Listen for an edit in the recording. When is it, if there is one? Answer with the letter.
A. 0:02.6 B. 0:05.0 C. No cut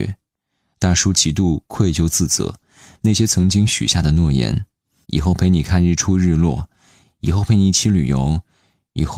B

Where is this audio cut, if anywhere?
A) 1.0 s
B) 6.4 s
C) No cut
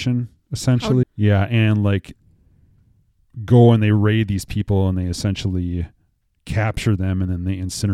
A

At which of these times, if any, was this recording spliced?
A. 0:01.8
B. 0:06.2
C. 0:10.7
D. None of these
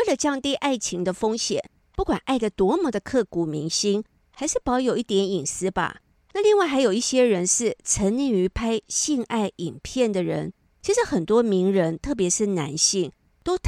B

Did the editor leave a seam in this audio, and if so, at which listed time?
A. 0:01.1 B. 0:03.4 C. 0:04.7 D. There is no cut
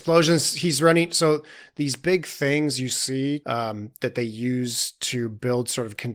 B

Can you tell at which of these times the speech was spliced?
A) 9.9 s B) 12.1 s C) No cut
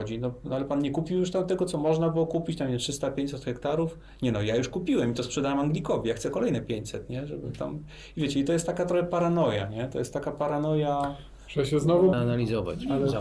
B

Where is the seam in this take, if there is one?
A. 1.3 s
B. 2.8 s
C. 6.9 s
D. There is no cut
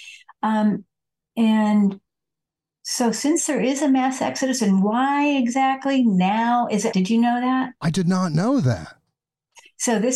C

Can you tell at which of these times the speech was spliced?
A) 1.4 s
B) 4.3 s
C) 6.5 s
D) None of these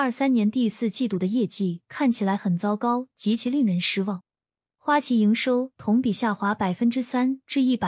D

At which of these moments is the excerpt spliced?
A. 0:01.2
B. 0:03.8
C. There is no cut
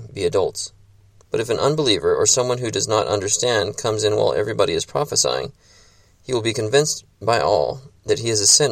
A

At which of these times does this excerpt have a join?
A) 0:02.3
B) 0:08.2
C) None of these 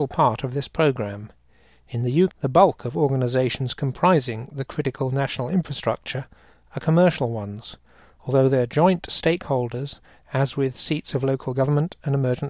A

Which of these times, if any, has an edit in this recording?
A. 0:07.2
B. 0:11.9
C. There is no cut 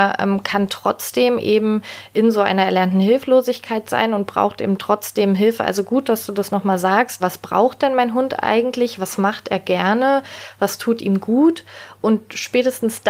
A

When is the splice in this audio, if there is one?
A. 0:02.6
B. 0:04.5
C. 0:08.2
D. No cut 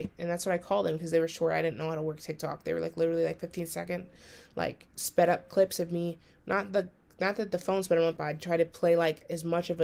C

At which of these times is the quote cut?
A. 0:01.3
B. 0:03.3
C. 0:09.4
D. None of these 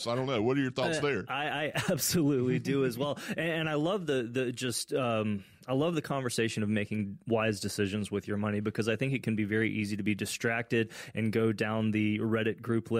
D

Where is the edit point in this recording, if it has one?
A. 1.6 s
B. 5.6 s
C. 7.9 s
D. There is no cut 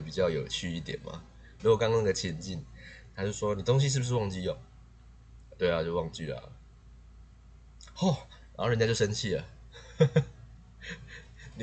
A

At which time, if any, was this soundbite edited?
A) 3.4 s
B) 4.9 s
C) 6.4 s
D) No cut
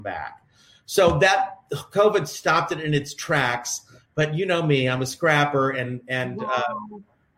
D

